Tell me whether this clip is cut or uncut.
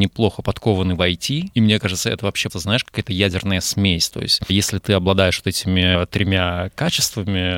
cut